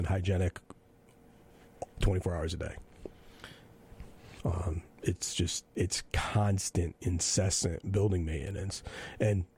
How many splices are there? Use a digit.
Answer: 2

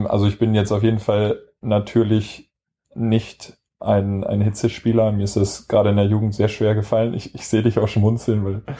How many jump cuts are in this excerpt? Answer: 0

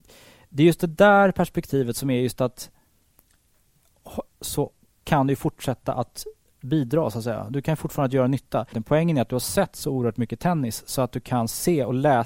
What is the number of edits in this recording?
2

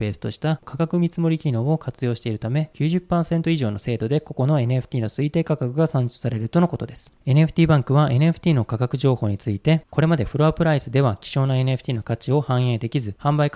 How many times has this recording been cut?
0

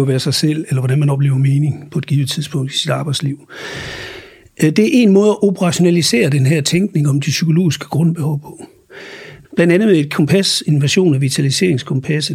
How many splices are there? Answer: 1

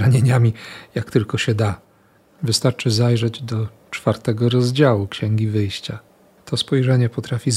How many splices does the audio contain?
1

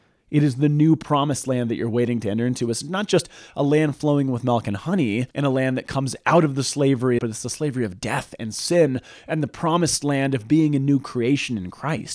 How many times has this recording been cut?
2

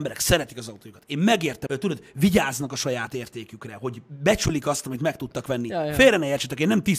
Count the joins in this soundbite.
1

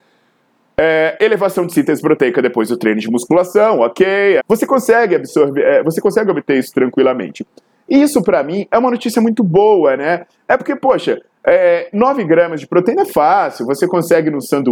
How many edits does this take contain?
2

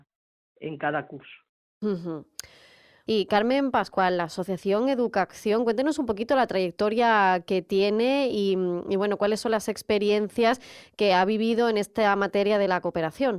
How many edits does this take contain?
0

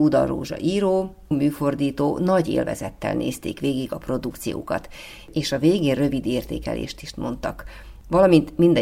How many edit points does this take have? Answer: 1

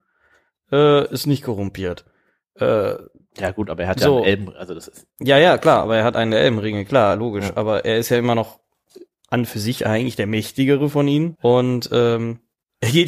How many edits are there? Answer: 1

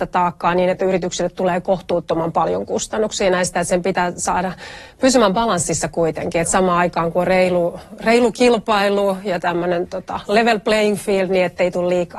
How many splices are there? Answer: 0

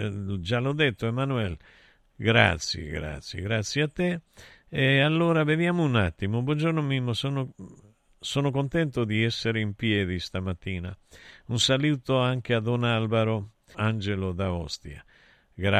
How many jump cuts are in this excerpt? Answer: 1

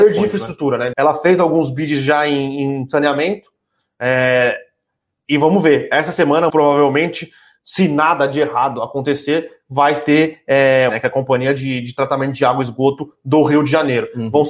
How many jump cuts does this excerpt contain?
3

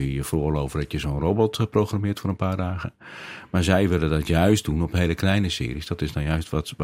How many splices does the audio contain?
0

